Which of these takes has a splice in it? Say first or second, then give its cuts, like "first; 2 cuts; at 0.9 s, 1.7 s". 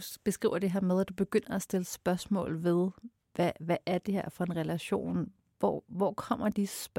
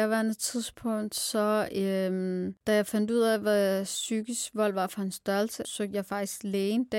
second; 2 cuts; at 2.6 s, 5.6 s